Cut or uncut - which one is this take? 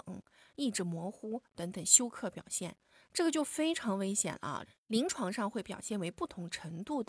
cut